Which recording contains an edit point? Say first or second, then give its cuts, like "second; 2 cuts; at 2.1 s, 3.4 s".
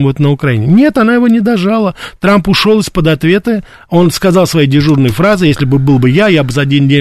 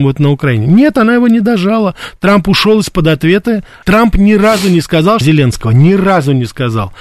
second; 2 cuts; at 3.8 s, 5.2 s